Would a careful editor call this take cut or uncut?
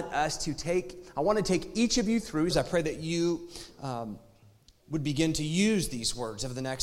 cut